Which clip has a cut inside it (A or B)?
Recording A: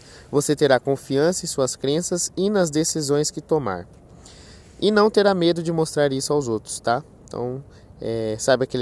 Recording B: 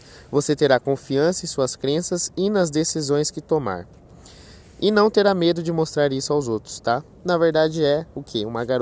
B